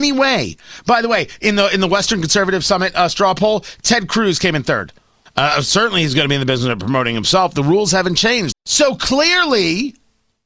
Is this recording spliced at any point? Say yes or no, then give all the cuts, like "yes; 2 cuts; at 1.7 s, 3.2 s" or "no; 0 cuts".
yes; 2 cuts; at 5.3 s, 8.5 s